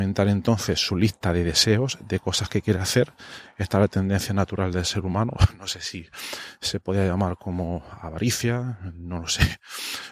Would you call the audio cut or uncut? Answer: uncut